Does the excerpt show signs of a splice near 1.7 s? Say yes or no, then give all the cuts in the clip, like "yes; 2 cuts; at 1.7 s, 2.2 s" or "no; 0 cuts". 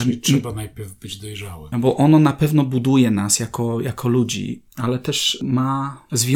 yes; 1 cut; at 1.7 s